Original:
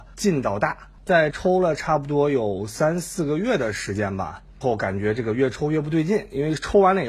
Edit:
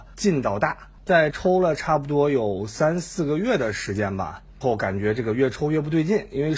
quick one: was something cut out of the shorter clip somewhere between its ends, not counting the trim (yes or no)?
no